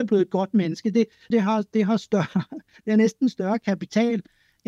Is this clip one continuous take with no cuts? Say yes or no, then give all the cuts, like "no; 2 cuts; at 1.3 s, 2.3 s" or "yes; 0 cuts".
no; 1 cut; at 1.3 s